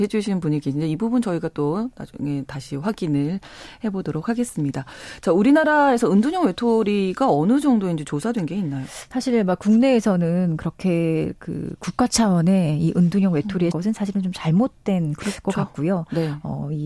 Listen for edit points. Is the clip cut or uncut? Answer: cut